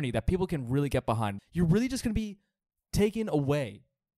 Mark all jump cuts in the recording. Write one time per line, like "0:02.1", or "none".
0:01.4